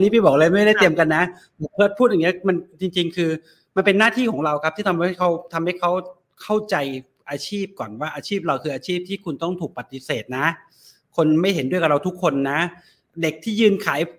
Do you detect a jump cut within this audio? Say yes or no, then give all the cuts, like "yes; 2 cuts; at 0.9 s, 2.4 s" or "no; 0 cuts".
no; 0 cuts